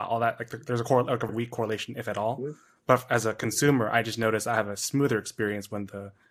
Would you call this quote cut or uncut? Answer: cut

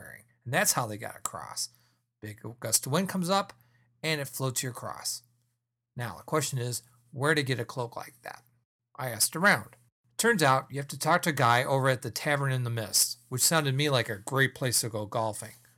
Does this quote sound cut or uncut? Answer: uncut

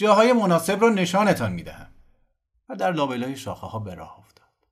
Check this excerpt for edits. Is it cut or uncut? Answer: uncut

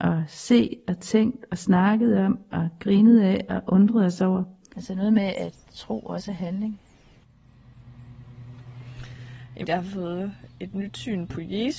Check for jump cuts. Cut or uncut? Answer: cut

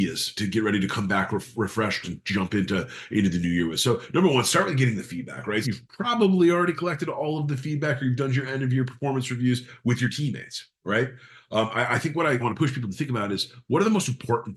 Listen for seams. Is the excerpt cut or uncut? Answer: cut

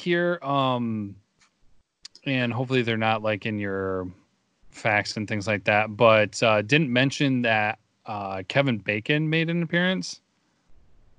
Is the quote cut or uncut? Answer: uncut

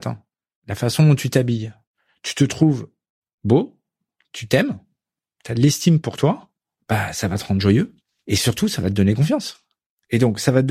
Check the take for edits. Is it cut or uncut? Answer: uncut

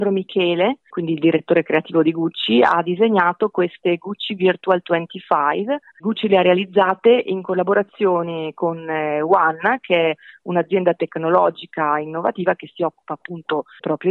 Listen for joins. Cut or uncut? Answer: cut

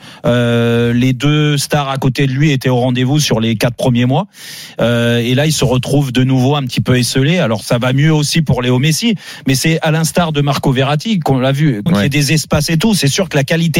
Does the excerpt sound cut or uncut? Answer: cut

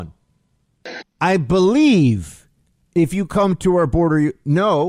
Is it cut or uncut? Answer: cut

